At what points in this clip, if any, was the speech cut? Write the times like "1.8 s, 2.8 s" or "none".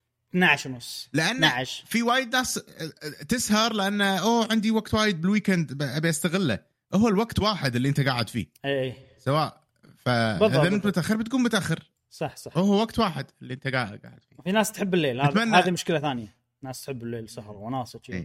none